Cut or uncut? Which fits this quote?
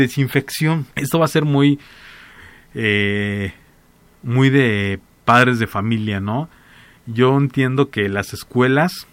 cut